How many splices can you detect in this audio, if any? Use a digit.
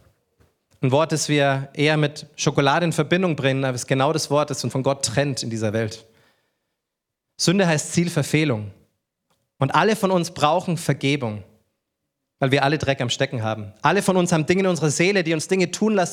1